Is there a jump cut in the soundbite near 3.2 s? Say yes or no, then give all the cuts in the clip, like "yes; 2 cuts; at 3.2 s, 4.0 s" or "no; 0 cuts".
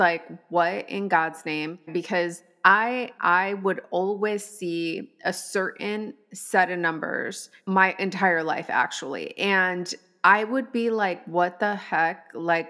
yes; 2 cuts; at 1.9 s, 3.2 s